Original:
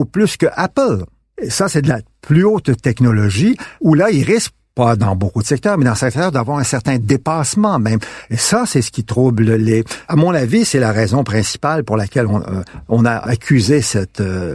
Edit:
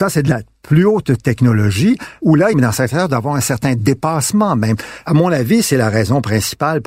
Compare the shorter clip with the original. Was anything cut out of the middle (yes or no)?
yes